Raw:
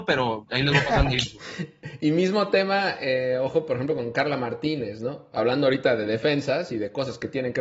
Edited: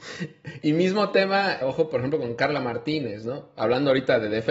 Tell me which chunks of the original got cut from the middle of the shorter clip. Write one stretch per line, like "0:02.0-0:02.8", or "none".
0:03.0-0:03.4